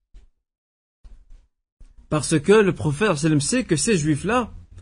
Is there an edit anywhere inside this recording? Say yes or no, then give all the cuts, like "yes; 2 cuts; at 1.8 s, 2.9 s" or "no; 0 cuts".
no; 0 cuts